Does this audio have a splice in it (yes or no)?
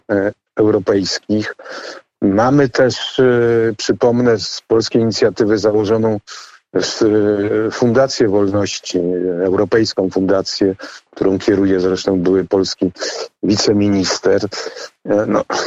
no